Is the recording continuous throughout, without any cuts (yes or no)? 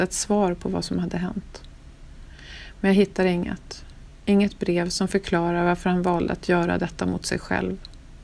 yes